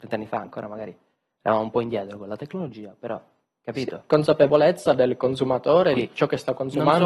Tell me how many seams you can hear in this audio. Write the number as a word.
one